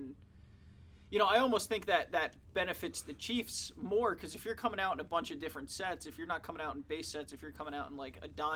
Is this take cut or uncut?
uncut